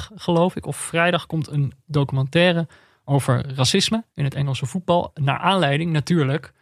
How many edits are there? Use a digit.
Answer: 1